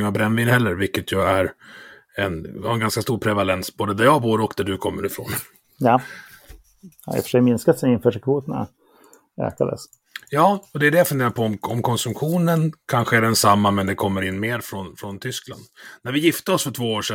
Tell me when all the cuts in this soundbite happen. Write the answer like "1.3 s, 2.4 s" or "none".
none